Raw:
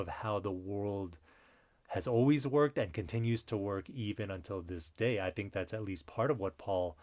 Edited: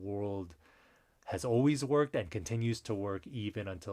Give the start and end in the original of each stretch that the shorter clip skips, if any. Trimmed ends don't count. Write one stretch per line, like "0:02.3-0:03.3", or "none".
none